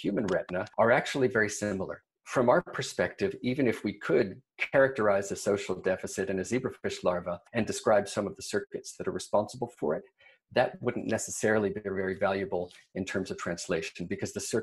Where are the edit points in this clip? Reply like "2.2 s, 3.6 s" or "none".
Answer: 2.2 s